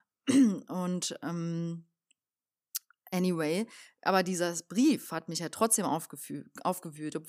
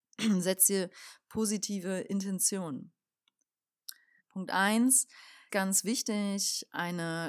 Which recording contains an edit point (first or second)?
second